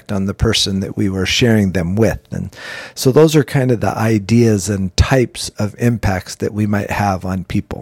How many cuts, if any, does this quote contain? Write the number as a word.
zero